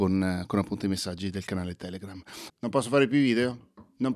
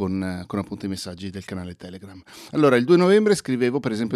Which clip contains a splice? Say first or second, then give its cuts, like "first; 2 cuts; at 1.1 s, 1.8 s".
first; 1 cut; at 2.5 s